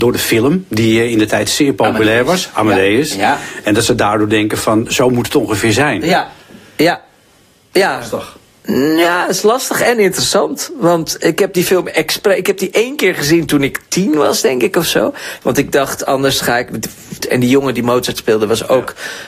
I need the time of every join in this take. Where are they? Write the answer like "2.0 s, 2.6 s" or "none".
15.4 s, 17.2 s